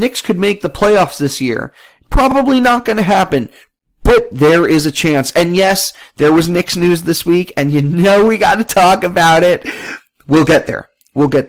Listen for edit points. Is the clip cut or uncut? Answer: uncut